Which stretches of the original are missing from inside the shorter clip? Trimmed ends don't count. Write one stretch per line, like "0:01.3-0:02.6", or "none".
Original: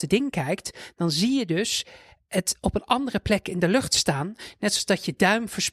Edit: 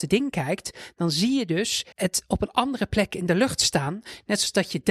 0:01.9-0:02.3